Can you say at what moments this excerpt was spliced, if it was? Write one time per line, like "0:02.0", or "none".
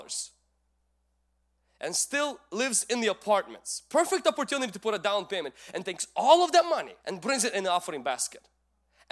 0:07.0